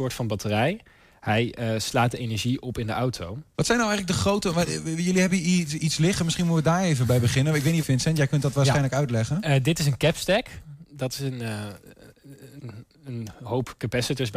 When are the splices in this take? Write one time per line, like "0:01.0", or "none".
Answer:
0:03.5
0:07.8